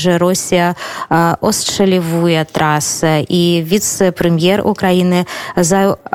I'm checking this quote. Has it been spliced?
no; 0 cuts

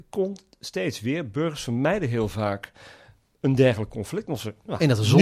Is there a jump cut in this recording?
no; 0 cuts

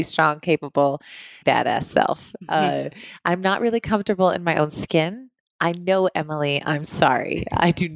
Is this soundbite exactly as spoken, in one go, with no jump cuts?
no; 1 cut; at 1.4 s

